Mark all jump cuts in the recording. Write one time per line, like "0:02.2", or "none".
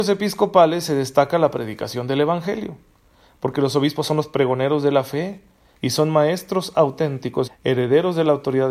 0:05.7
0:07.5